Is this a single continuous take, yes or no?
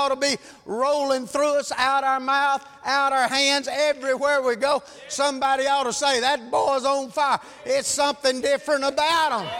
yes